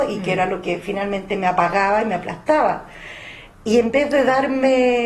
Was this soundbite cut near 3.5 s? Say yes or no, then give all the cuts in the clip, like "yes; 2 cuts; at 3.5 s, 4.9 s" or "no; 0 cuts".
yes; 1 cut; at 3.5 s